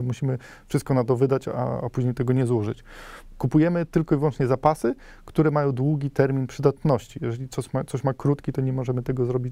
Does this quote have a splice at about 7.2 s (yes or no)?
no